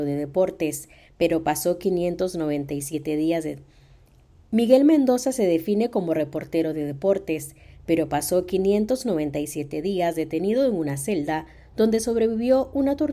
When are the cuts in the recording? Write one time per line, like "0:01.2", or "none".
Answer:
none

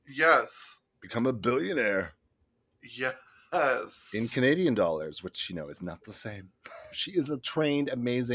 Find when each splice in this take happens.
0:06.9

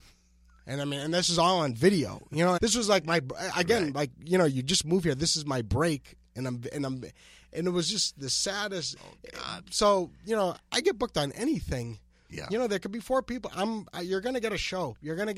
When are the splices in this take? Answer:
0:02.6
0:09.0

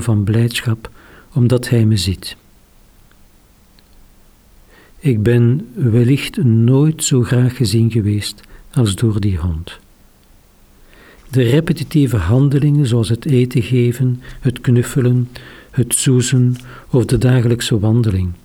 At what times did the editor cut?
0:11.2

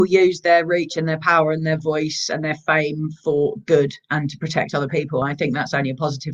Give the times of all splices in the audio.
none

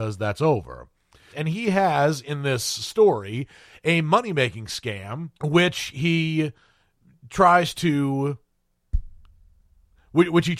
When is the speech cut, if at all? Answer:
0:01.3
0:05.3

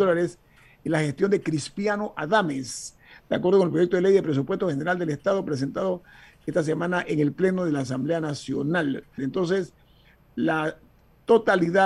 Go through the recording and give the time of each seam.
0:09.2

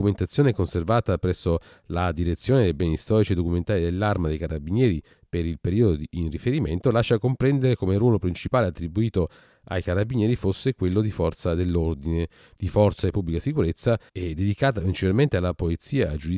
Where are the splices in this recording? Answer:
0:14.1

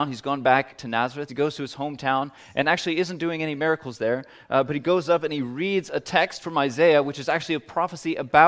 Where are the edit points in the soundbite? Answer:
0:01.3

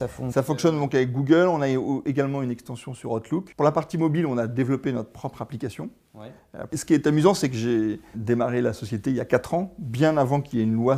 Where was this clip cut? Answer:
0:06.7
0:08.1

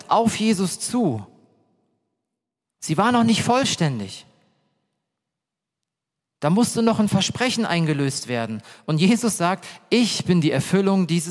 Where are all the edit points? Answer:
none

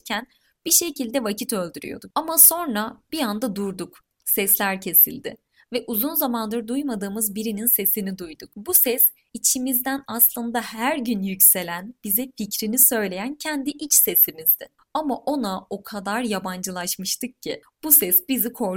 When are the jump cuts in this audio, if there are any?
0:02.1

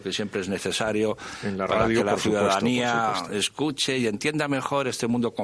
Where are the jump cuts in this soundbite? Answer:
none

